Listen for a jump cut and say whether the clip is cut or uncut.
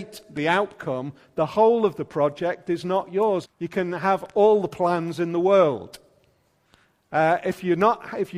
cut